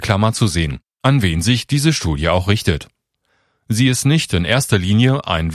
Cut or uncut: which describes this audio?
uncut